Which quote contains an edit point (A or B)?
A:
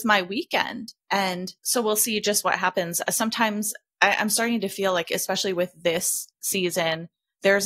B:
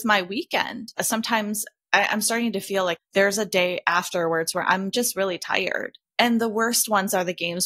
B